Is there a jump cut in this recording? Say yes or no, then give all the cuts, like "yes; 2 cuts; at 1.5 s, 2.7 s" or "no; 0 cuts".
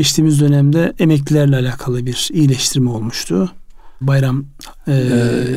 yes; 1 cut; at 4.0 s